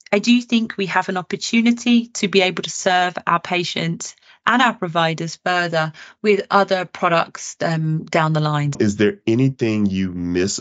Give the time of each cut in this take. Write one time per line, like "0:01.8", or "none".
0:08.7